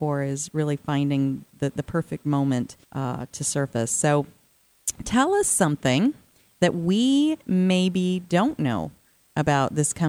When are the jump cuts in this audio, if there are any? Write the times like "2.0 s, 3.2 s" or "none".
2.8 s